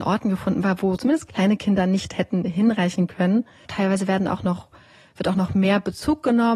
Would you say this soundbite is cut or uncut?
cut